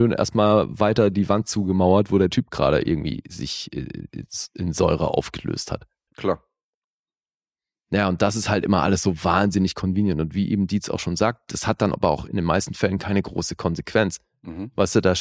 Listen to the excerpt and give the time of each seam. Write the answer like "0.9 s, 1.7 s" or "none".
6.1 s